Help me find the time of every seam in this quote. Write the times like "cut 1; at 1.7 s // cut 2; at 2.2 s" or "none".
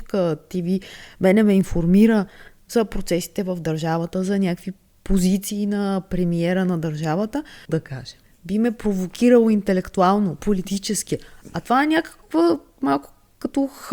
cut 1; at 7.7 s

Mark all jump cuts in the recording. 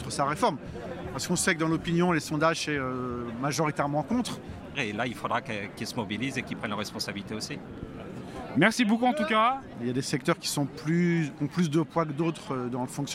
cut 1; at 4.8 s // cut 2; at 9.7 s

